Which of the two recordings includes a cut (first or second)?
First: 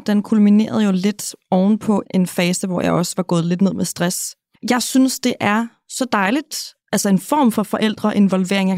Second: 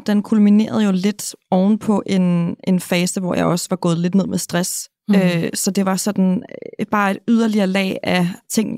first